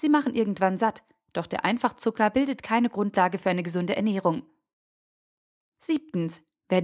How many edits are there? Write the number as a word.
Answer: one